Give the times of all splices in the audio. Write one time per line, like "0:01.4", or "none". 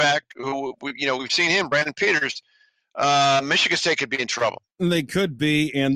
0:04.7